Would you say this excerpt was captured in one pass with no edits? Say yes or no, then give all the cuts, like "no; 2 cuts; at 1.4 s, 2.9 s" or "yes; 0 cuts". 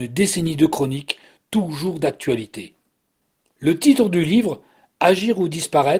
no; 1 cut; at 3.5 s